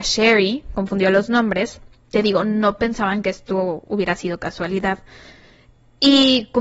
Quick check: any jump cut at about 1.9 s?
no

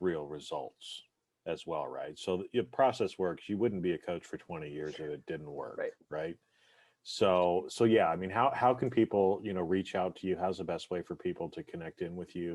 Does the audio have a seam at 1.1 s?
no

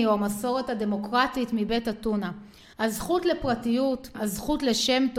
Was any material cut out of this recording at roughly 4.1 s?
yes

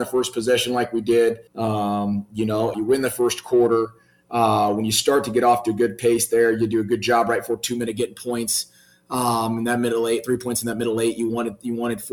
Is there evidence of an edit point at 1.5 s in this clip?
yes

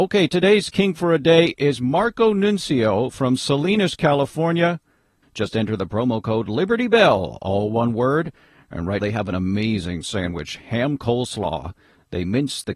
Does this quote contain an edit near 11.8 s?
no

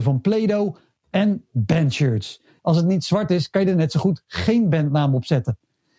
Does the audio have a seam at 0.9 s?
no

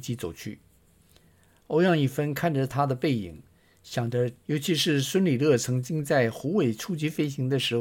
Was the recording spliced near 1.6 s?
no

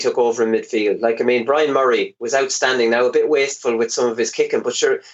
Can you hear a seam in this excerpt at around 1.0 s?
no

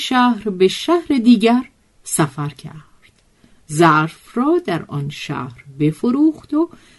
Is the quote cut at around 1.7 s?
no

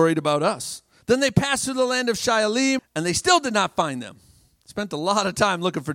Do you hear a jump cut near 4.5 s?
no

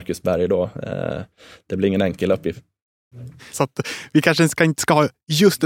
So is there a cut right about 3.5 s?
yes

